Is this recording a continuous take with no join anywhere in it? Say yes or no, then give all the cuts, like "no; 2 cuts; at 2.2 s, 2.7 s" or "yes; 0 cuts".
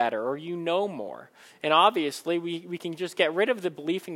yes; 0 cuts